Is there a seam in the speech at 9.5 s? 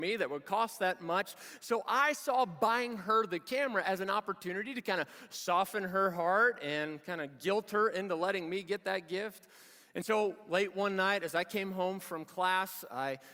no; 0 cuts

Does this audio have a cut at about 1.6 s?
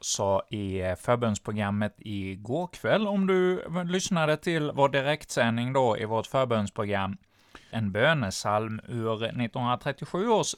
no; 1 cut; at 7.7 s

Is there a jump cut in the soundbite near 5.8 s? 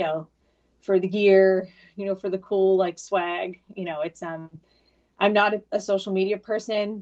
no; 0 cuts

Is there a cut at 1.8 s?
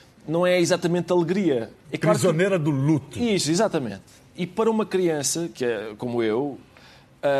yes; 1 cut; at 1.8 s

